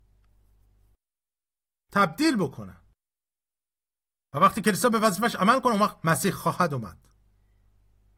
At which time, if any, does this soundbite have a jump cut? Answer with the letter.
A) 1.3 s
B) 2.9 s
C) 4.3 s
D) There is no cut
D